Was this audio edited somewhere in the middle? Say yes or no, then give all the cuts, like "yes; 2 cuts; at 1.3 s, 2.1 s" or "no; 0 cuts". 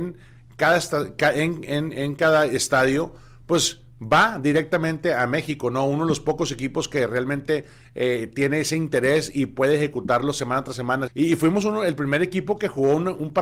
yes; 1 cut; at 11.1 s